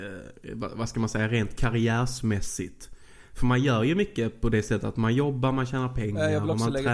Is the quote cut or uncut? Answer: uncut